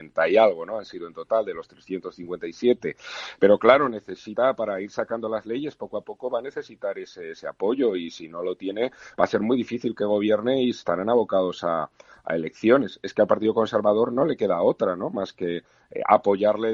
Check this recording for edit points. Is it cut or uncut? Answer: uncut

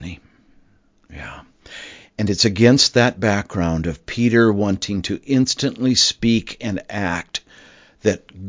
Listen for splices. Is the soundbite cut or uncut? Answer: uncut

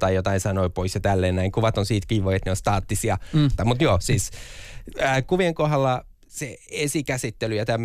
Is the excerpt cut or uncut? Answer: cut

